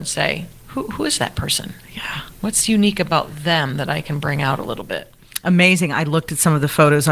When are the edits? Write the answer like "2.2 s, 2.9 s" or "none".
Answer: none

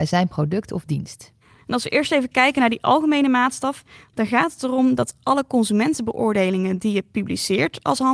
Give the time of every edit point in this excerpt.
1.6 s

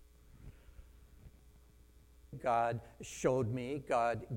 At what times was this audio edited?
2.3 s

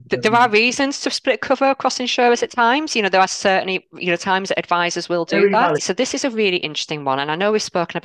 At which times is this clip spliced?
5.8 s

